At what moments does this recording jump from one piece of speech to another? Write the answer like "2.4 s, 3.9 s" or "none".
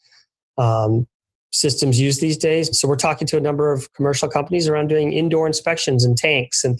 2.7 s